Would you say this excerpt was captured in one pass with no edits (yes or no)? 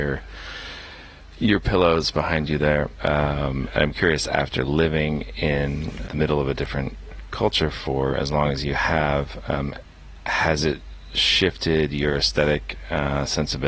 no